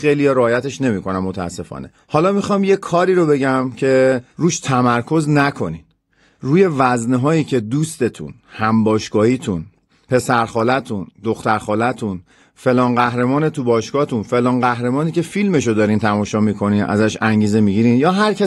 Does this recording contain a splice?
no; 0 cuts

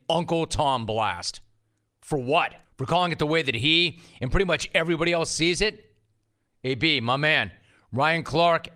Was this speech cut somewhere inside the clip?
yes; 1 cut; at 2.6 s

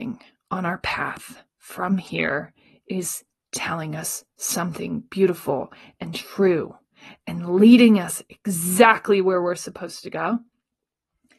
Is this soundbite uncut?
yes; 0 cuts

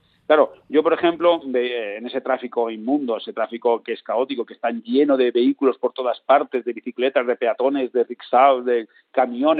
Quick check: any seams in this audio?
no; 0 cuts

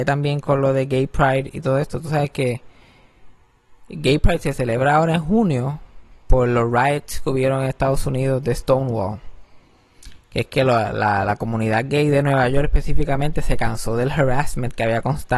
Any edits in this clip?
no; 0 cuts

